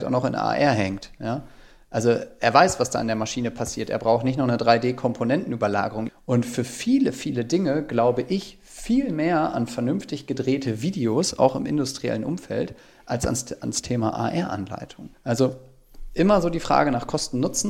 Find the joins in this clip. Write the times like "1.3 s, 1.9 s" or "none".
6.1 s, 15.1 s